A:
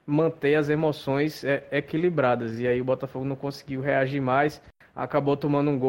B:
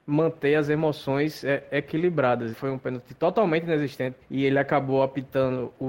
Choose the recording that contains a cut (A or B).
B